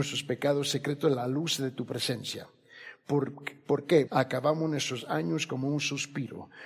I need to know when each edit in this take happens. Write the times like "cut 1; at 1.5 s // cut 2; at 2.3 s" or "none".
cut 1; at 4.1 s